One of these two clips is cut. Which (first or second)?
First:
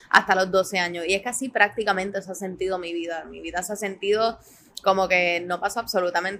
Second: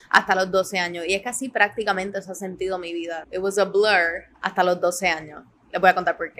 second